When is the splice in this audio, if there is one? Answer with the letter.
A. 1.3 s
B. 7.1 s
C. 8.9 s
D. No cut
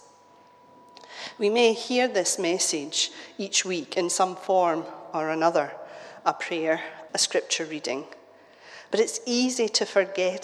B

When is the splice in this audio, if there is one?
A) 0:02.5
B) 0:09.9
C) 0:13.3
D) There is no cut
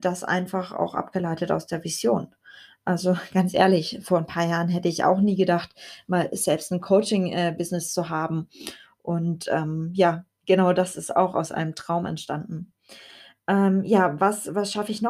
D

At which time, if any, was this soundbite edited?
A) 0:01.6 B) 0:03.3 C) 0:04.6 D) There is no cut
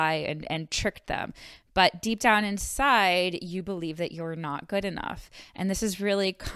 D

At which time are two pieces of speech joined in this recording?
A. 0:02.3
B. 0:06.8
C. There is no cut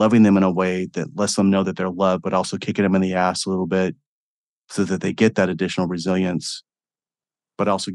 C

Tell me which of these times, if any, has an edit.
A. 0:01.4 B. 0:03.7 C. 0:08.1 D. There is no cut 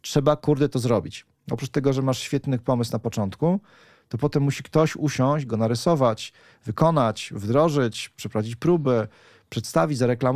D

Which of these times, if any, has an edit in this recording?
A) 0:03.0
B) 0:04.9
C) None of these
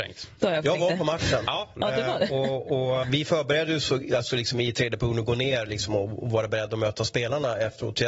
A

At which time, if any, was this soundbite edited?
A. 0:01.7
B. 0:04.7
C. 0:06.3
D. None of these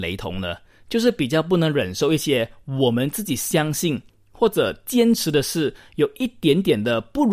D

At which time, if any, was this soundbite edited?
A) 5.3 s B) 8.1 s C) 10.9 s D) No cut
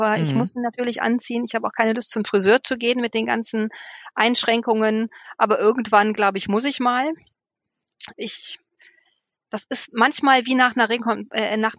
B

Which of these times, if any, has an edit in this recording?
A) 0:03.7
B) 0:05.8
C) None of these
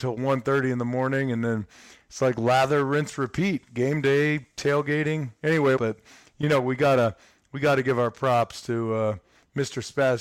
B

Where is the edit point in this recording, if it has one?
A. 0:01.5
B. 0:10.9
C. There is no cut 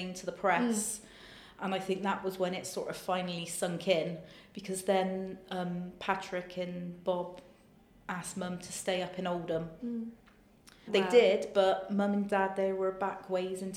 B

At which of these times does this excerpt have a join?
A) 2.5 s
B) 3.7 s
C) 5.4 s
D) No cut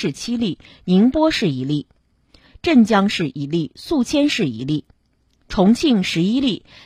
A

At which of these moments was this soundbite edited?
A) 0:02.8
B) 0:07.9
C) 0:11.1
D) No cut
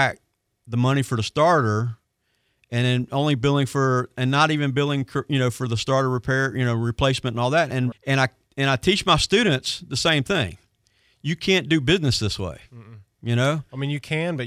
B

